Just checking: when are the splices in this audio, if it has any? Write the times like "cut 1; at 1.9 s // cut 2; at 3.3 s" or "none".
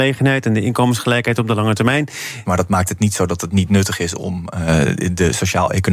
cut 1; at 2.4 s